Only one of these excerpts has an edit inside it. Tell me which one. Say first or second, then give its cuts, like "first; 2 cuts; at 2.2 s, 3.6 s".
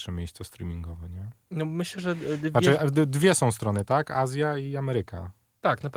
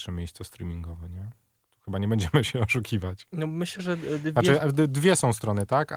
first; 1 cut; at 1.5 s